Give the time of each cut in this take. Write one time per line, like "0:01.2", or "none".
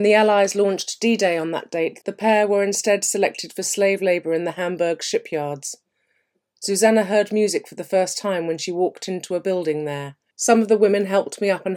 0:02.0
0:10.3